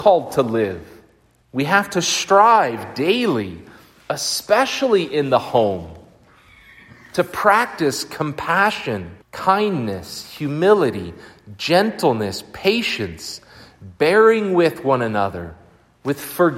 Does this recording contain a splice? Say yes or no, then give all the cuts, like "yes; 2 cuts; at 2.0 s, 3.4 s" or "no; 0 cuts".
yes; 2 cuts; at 1.4 s, 9.2 s